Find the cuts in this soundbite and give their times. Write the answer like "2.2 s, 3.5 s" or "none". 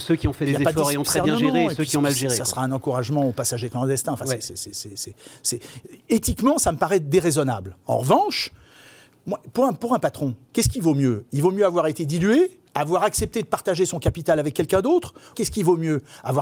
12.7 s, 15.3 s